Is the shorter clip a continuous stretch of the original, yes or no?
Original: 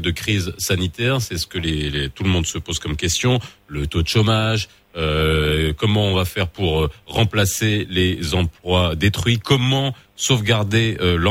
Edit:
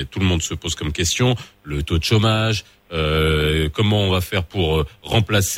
yes